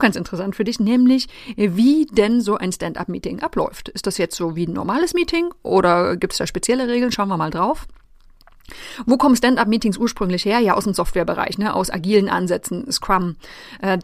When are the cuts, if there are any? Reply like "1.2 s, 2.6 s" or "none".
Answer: none